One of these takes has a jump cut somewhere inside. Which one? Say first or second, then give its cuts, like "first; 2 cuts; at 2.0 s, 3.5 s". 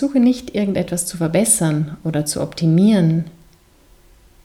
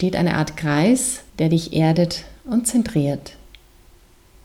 second; 1 cut; at 1.3 s